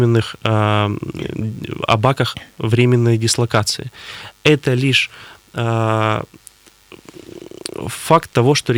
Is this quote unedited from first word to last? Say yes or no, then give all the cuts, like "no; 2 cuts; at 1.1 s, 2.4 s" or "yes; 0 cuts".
yes; 0 cuts